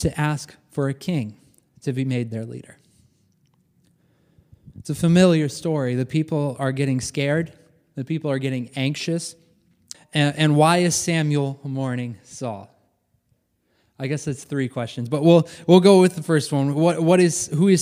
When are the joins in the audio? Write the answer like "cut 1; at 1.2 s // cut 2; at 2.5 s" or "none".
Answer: cut 1; at 9.9 s